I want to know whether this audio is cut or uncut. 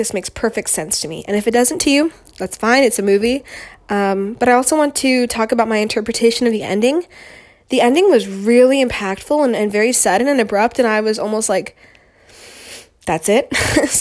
uncut